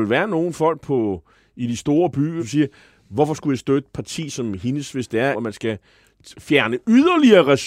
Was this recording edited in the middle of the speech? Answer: yes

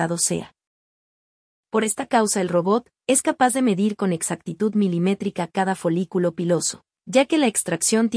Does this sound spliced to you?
yes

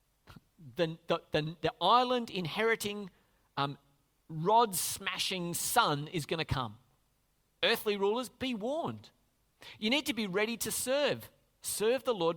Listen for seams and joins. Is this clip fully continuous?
yes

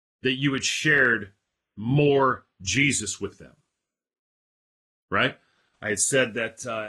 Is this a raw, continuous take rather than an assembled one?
yes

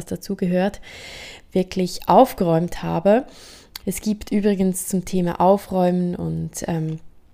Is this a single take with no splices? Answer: no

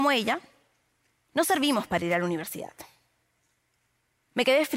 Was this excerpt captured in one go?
yes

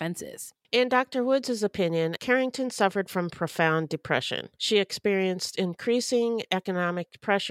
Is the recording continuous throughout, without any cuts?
no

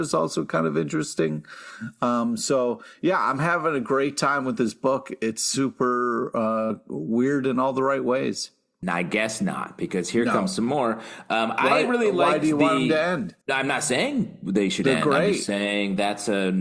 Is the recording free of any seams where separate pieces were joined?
no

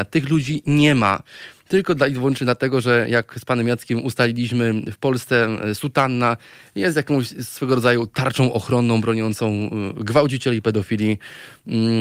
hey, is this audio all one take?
yes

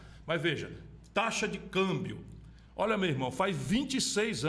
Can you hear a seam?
yes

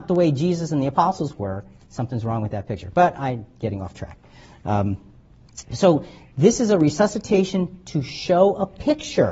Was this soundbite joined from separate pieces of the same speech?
no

